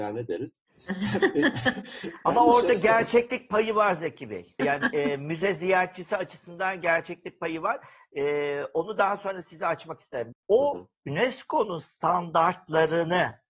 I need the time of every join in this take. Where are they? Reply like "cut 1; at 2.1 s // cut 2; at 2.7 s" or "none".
cut 1; at 4.6 s // cut 2; at 10.3 s